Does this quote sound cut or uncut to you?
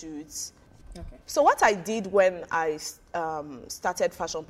uncut